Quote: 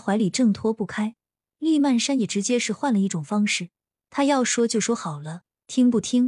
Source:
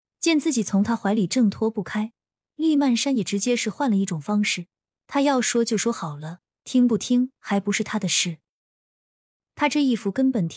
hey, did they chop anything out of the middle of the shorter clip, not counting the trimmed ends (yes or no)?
no